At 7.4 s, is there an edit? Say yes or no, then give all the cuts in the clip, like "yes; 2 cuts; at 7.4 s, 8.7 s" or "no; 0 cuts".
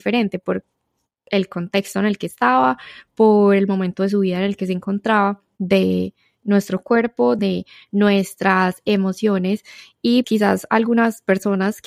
yes; 3 cuts; at 5.6 s, 7.4 s, 10.2 s